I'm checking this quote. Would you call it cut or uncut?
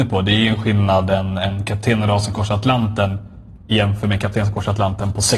uncut